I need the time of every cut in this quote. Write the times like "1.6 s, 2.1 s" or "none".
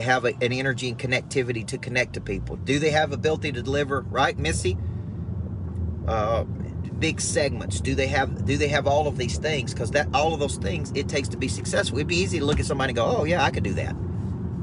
2.6 s